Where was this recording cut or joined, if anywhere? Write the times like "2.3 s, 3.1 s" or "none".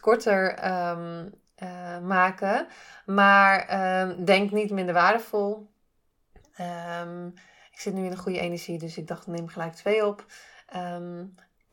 none